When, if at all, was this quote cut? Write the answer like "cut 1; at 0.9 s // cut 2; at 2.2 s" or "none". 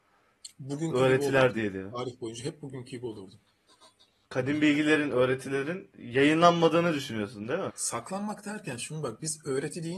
cut 1; at 4.2 s // cut 2; at 7.7 s